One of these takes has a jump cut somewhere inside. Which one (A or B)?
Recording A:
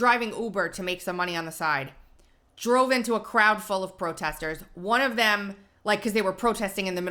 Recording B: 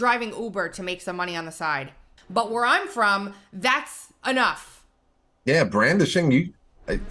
B